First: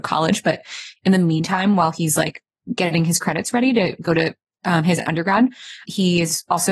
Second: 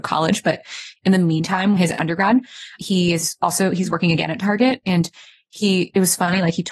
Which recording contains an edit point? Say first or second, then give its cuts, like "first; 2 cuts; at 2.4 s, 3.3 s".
second; 1 cut; at 1.8 s